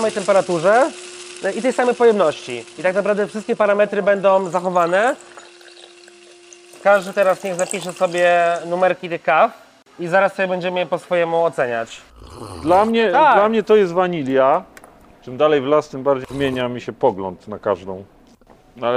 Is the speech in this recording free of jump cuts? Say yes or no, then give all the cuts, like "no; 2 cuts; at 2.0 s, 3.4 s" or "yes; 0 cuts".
yes; 0 cuts